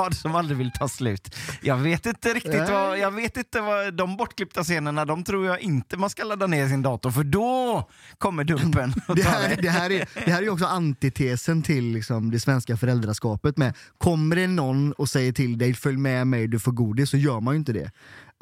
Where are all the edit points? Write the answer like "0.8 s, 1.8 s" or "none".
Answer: none